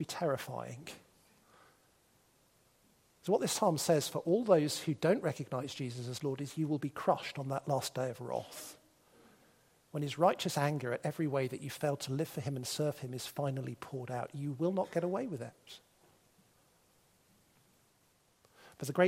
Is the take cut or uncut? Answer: uncut